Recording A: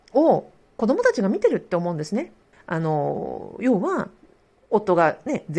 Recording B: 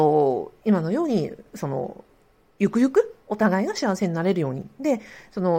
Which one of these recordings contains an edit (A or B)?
A